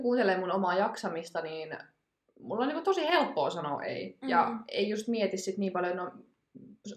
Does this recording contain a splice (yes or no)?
no